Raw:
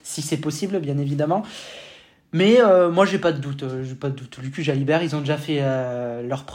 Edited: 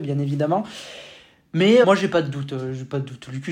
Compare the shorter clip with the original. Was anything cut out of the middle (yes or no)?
yes